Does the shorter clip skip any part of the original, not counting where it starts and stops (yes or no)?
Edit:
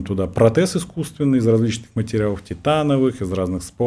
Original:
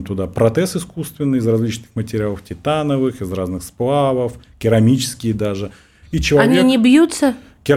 no